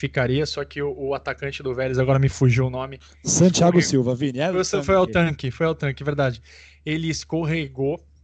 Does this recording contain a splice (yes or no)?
no